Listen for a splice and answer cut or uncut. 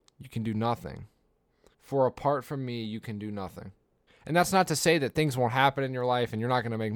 cut